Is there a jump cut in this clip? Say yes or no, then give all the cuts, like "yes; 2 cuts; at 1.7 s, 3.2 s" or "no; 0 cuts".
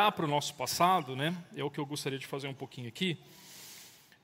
no; 0 cuts